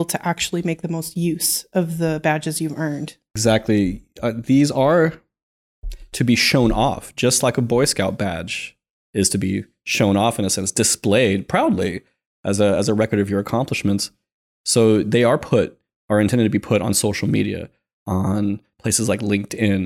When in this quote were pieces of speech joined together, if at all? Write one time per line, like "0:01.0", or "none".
none